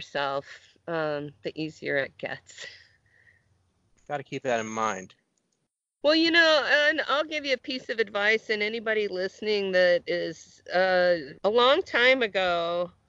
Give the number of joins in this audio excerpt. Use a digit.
2